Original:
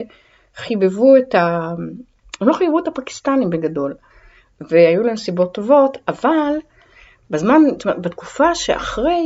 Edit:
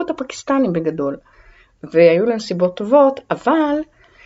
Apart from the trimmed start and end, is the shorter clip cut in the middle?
no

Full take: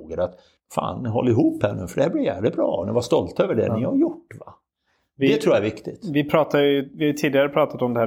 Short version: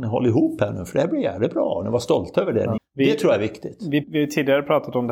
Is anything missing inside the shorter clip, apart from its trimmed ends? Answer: yes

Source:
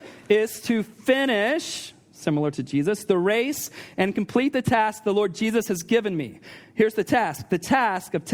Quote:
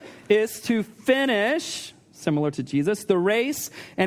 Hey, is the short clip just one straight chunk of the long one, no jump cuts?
yes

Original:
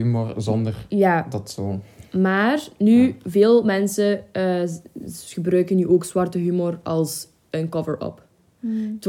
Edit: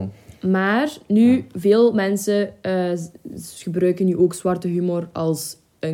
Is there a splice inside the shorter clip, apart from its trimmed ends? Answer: no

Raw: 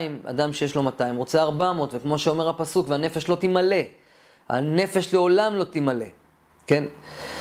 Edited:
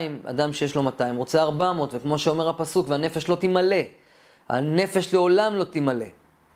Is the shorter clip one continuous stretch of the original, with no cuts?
yes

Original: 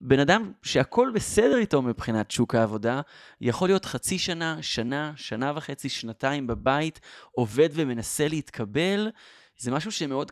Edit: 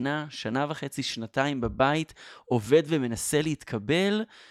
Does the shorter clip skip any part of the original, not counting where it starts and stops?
no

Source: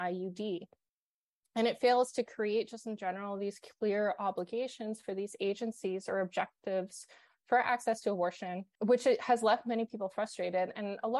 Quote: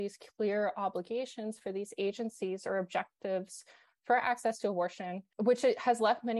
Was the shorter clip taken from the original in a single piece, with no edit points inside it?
yes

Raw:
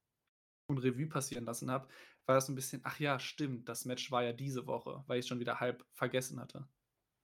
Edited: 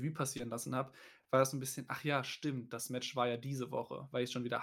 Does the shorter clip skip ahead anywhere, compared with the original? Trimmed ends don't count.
no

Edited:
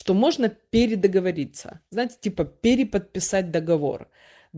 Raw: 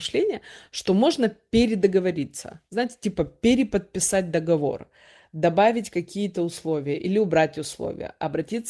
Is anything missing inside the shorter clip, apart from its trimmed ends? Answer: no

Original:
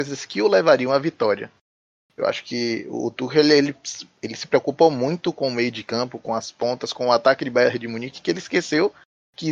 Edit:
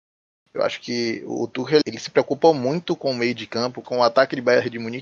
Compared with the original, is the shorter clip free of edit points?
no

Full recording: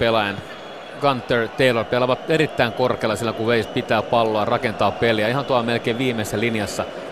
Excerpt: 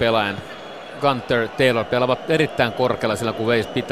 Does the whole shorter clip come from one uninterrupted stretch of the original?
yes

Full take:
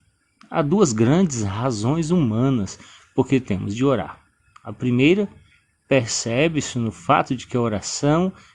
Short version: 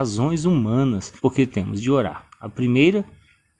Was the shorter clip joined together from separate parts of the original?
yes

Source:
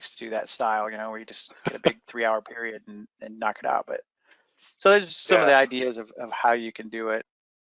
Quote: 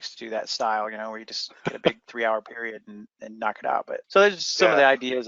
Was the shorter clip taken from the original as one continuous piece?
no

